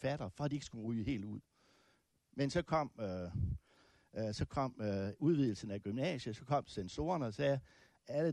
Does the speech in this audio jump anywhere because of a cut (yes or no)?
no